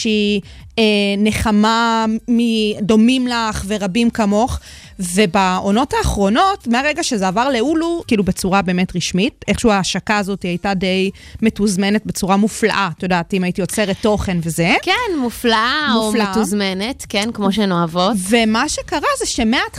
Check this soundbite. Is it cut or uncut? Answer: cut